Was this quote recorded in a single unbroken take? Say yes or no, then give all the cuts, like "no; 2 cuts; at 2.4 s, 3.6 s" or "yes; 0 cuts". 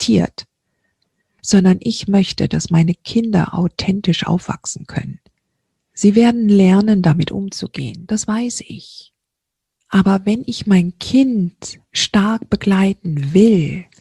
yes; 0 cuts